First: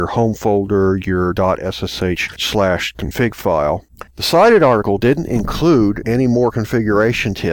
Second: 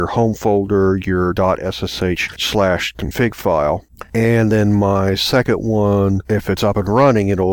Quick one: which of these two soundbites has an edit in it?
first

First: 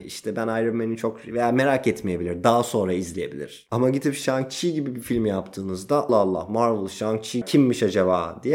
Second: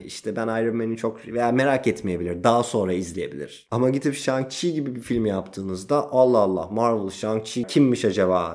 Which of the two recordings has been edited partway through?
first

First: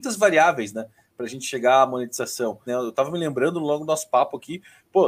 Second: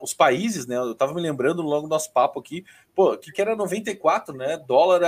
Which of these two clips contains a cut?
first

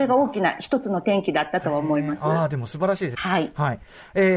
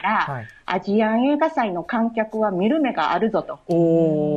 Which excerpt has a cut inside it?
first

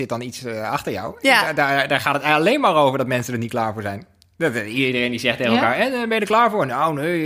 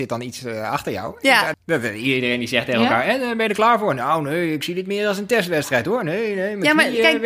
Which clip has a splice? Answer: second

